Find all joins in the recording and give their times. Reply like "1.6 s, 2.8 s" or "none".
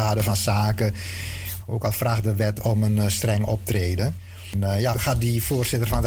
1.6 s, 4.9 s